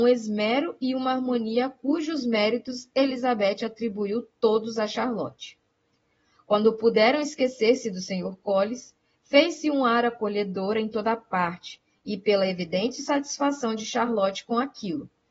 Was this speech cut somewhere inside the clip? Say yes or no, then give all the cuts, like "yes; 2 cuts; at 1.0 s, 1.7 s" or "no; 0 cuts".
no; 0 cuts